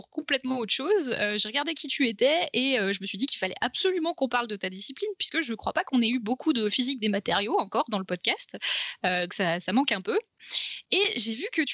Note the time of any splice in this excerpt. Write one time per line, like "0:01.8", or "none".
0:09.3